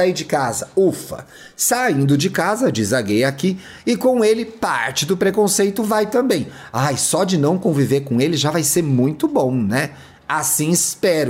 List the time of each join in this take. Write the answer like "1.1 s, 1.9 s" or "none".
none